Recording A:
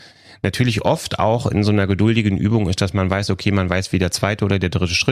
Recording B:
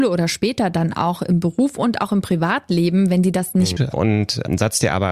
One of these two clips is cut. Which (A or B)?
B